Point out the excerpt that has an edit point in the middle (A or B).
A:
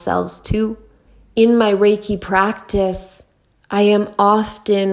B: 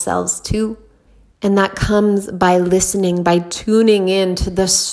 B